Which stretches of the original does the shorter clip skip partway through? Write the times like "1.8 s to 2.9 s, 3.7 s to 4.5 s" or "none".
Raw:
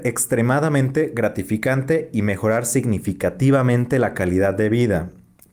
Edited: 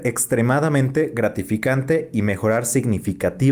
none